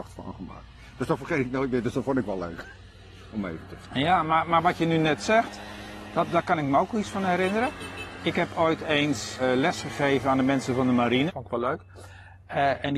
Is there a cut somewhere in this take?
yes; 2 cuts; at 9.4 s, 11.3 s

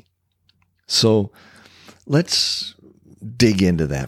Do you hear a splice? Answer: no; 0 cuts

